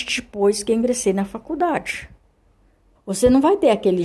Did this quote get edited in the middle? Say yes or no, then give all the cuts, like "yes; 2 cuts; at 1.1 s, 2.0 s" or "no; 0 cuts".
yes; 1 cut; at 3.0 s